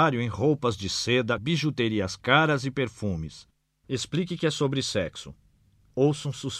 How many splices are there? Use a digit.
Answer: 2